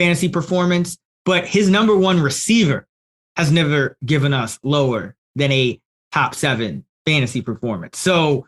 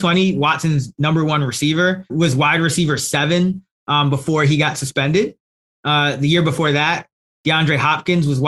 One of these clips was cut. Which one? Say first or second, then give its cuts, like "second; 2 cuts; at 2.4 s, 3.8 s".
second; 1 cut; at 2.1 s